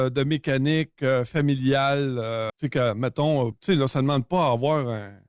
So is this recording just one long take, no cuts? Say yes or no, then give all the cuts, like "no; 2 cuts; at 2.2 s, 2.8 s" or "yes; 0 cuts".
no; 2 cuts; at 2.5 s, 3.5 s